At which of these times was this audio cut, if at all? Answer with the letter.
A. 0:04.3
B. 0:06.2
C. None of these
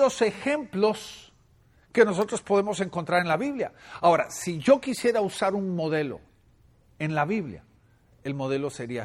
C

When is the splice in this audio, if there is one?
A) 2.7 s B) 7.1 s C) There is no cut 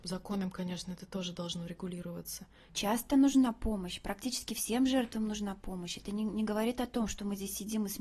A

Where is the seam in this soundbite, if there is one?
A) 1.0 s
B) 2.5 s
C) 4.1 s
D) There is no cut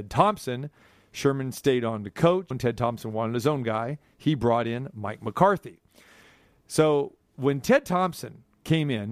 B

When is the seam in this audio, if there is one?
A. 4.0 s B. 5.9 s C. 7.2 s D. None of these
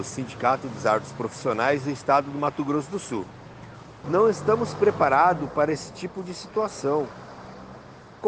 A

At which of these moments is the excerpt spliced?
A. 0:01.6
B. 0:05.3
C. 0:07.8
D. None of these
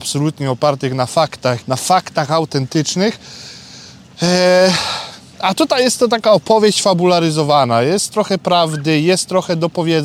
A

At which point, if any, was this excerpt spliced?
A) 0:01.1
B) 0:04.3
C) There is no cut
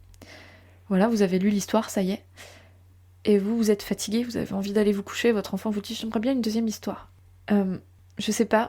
C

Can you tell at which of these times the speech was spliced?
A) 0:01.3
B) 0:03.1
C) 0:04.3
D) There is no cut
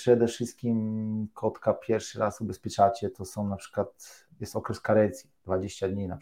D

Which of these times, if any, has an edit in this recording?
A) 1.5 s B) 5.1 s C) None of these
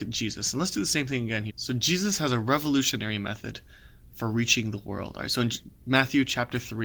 A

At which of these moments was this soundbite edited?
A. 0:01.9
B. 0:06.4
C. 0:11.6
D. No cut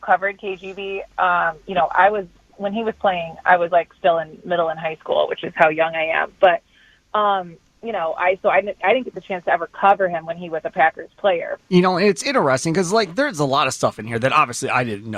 C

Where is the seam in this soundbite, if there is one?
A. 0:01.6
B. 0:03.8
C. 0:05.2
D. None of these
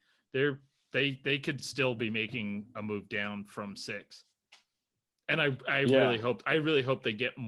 D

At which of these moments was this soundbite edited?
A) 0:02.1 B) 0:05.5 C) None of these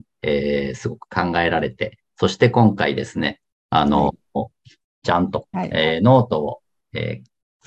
B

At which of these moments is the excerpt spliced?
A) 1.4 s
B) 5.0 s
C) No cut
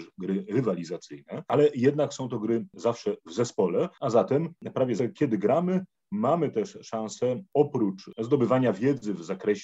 B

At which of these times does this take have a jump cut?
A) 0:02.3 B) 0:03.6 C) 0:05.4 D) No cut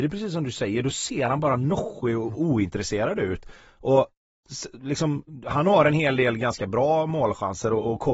A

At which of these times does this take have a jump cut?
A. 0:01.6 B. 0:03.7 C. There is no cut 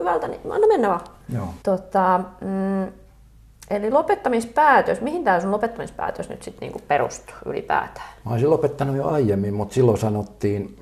A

